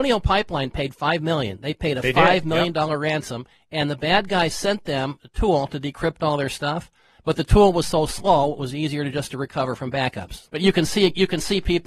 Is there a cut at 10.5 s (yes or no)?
yes